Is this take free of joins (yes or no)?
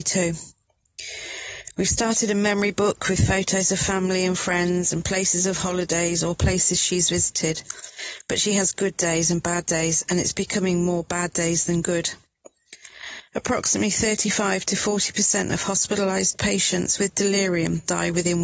no